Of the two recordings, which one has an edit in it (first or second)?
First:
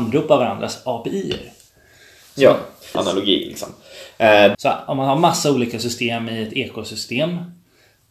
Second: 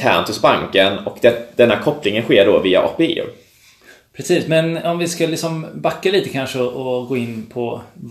first